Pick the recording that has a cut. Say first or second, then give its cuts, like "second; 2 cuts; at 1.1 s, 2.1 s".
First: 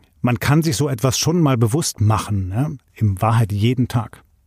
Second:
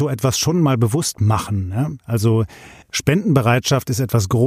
first; 1 cut; at 2.8 s